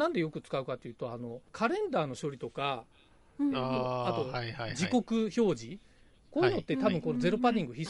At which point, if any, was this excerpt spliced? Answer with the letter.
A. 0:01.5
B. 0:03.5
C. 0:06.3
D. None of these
A